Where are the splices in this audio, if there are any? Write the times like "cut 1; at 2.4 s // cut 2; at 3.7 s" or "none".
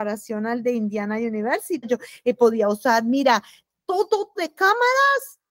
cut 1; at 1.8 s // cut 2; at 4.4 s